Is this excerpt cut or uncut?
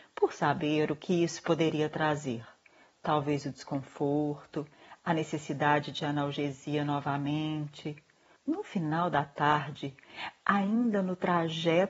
cut